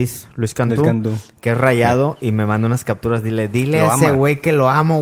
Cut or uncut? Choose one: uncut